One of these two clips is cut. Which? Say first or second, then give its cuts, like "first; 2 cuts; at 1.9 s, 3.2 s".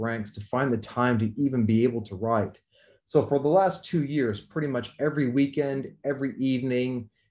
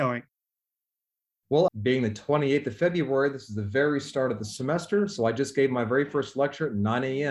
second; 1 cut; at 1.7 s